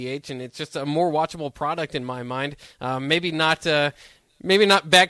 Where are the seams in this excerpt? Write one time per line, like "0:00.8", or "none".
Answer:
none